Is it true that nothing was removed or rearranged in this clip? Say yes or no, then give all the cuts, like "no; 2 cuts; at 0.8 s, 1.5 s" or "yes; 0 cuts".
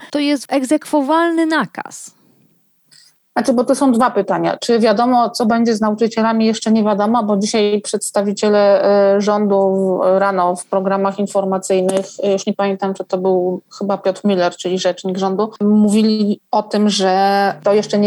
yes; 0 cuts